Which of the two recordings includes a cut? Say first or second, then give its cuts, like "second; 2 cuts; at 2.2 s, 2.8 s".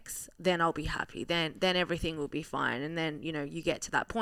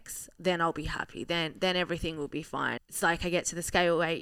second; 1 cut; at 2.8 s